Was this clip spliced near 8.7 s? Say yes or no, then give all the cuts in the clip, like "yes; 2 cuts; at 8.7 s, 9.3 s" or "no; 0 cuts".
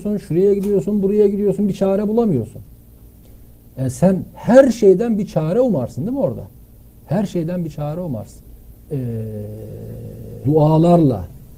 yes; 2 cuts; at 8.7 s, 10.4 s